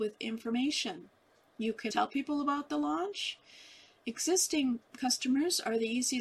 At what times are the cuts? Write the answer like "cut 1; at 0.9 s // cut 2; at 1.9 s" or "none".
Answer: cut 1; at 1.9 s